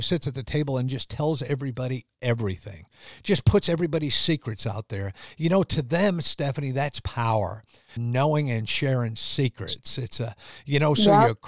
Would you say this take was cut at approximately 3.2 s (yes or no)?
no